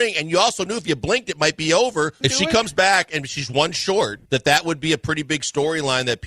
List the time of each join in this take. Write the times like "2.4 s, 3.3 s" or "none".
2.2 s, 4.3 s